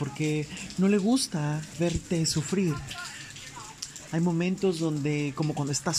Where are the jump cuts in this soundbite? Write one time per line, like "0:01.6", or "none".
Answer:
0:01.7
0:04.1